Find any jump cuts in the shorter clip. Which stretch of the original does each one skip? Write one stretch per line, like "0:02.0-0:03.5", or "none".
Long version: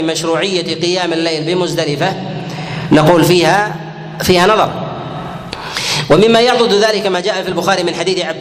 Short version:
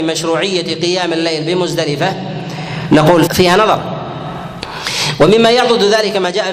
0:03.3-0:04.2